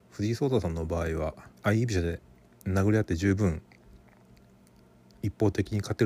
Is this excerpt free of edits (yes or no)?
no